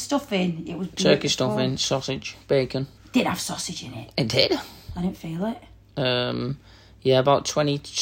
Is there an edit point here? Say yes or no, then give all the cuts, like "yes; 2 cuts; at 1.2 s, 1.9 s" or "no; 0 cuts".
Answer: yes; 1 cut; at 3.0 s